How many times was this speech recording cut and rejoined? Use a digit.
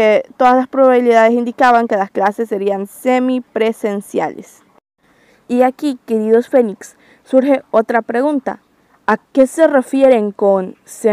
0